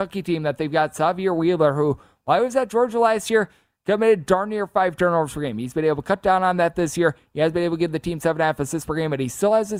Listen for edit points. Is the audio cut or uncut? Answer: uncut